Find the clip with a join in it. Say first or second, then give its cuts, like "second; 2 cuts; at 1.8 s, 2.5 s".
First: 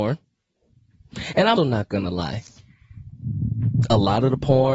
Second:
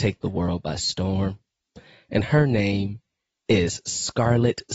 first; 1 cut; at 1.6 s